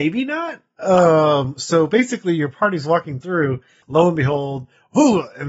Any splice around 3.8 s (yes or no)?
yes